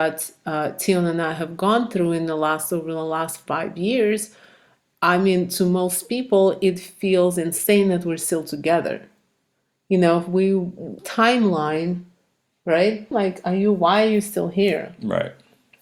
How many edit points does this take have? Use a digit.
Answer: 2